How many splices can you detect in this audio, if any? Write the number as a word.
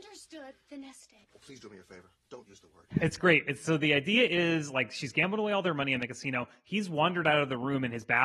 one